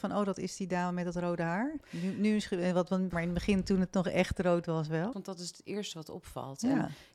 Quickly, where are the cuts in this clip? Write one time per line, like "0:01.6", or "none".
0:03.1
0:05.1